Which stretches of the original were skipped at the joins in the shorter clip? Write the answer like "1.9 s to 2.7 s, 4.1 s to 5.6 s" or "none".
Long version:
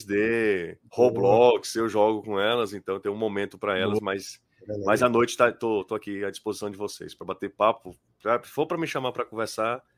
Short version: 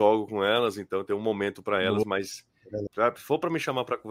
4.8 s to 8.1 s